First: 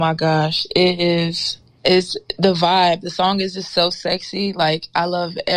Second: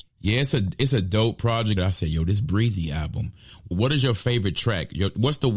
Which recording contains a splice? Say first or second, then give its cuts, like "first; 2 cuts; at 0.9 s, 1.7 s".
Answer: second; 2 cuts; at 1.8 s, 3.7 s